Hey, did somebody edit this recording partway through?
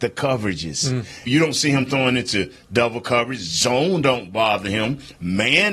yes; 1 cut; at 1.3 s

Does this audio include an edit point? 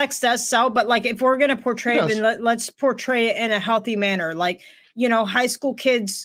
no; 0 cuts

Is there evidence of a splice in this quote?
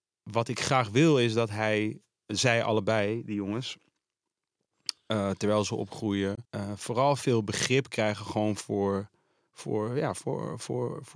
yes; 1 cut; at 6.5 s

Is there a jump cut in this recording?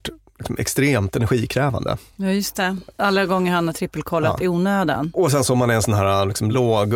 no; 0 cuts

